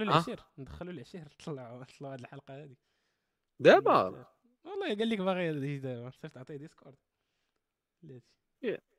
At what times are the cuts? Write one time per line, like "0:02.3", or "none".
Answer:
none